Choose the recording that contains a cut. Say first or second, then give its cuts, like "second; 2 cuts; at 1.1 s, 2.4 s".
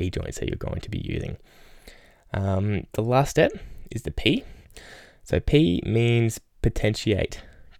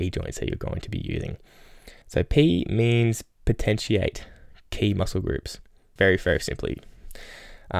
second; 2 cuts; at 2.0 s, 6.0 s